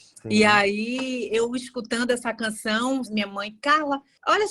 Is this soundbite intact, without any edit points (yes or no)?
no